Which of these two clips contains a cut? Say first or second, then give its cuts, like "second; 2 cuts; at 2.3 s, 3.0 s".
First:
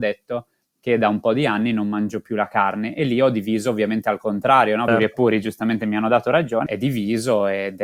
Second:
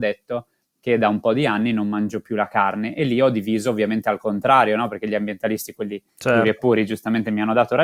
first; 2 cuts; at 4.9 s, 6.7 s